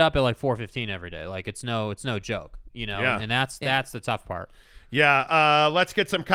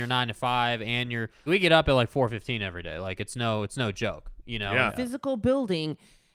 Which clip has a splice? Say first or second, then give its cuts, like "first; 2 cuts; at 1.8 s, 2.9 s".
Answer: second; 2 cuts; at 1.5 s, 4.9 s